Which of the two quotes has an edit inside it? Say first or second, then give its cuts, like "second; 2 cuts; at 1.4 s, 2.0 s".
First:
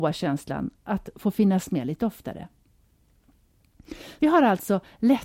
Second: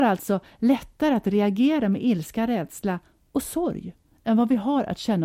first; 1 cut; at 4.2 s